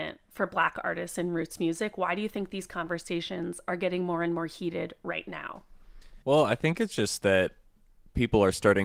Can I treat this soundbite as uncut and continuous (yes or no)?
no